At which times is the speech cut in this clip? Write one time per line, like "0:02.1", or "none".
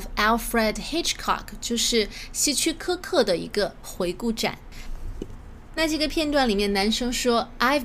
none